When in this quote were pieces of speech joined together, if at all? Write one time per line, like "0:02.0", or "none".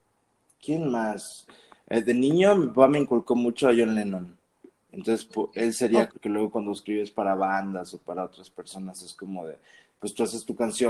0:01.5
0:06.1